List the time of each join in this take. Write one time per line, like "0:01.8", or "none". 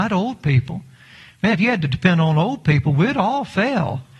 none